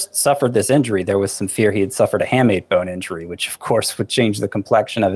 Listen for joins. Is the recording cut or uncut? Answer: uncut